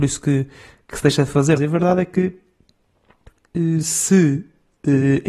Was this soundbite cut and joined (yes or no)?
yes